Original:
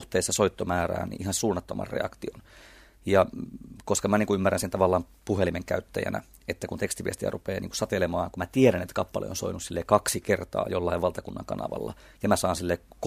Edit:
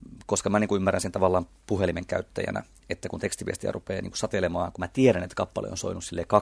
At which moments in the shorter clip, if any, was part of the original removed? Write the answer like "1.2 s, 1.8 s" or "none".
none